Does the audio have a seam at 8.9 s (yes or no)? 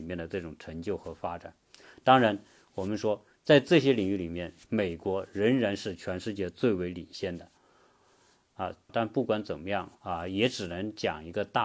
yes